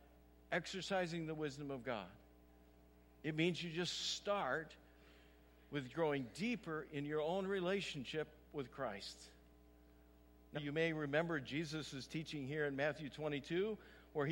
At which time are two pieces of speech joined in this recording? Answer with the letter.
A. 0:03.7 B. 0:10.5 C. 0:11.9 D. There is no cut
B